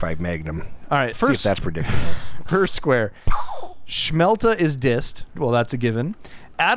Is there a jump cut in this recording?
yes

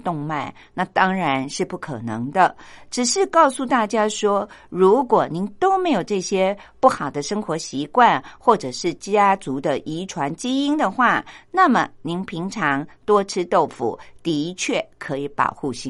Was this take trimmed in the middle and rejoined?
no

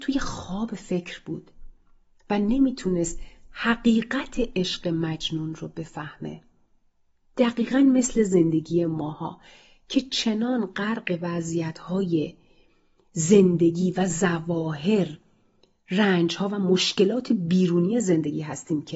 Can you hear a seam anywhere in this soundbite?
no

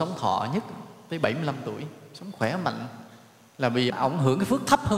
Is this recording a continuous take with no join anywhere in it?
no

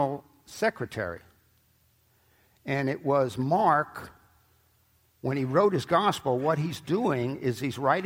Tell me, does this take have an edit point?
no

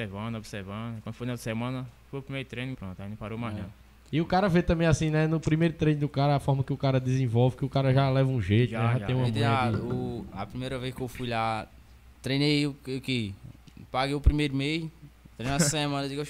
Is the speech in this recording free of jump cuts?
no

